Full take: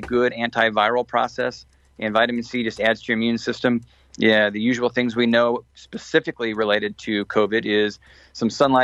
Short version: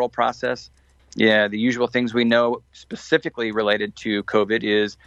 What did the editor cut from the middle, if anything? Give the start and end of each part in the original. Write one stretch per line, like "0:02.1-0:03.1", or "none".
0:01.9-0:04.0